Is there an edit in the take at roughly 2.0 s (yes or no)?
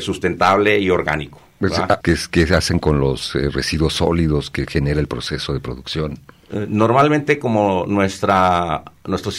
yes